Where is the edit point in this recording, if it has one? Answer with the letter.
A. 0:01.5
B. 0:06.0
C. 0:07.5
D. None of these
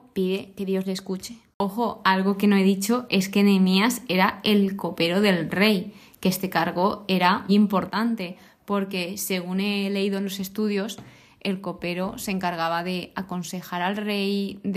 C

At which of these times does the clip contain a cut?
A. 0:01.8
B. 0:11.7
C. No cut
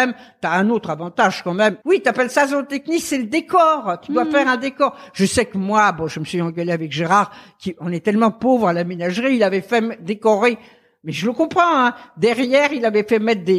A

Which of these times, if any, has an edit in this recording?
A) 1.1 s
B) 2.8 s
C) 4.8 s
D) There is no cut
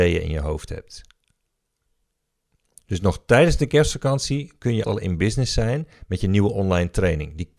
C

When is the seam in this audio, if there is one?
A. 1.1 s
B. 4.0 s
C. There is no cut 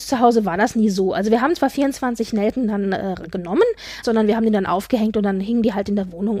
B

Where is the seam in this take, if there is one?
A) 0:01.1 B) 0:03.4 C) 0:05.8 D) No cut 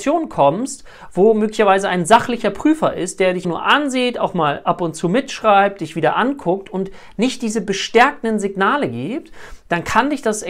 B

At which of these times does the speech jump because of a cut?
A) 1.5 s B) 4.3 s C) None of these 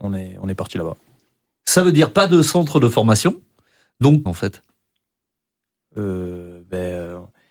B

